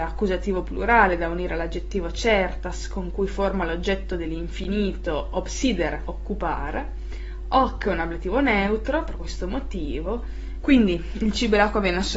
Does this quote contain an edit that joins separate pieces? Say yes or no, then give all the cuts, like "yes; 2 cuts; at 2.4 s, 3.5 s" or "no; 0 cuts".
yes; 2 cuts; at 6.1 s, 10.6 s